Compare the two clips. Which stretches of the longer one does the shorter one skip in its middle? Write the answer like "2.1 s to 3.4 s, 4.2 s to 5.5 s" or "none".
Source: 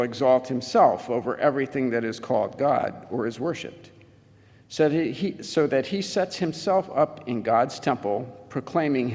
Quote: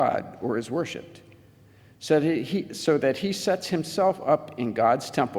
none